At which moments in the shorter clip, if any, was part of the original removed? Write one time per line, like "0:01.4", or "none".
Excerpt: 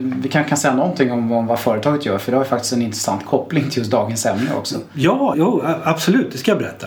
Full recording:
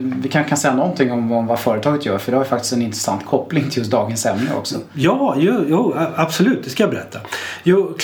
0:05.3